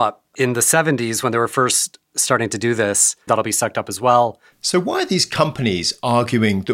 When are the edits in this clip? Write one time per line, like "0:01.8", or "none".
0:03.3
0:04.5

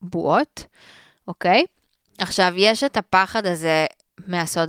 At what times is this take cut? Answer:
0:02.0

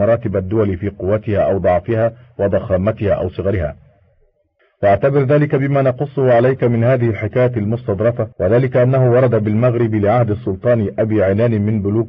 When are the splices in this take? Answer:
0:08.3

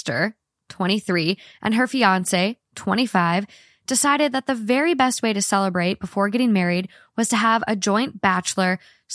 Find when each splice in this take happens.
none

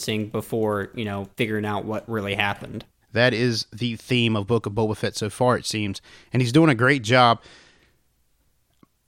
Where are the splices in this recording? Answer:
0:03.0

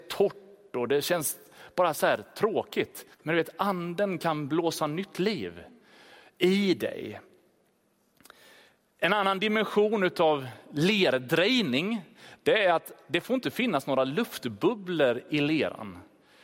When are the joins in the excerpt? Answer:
0:03.1

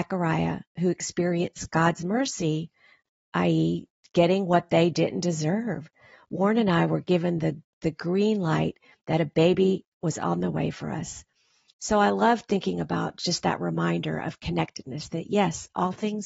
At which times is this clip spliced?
0:11.7

